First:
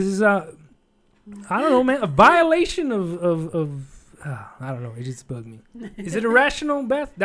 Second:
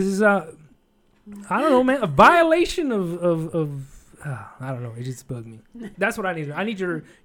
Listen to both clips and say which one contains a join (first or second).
second